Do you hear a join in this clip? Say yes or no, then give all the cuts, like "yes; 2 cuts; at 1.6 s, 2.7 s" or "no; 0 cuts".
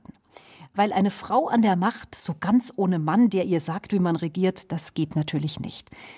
no; 0 cuts